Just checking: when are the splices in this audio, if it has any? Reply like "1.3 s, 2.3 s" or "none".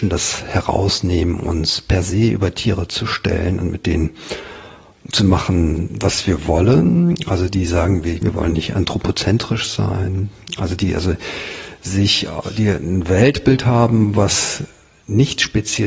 8.2 s